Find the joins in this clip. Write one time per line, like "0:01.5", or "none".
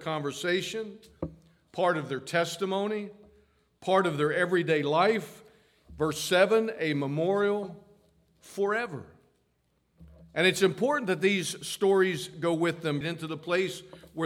0:13.0